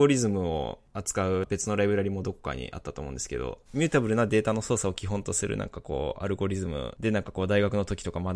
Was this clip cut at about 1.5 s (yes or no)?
no